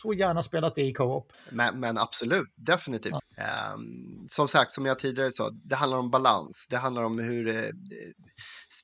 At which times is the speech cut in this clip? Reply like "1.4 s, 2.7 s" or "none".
1.3 s, 3.2 s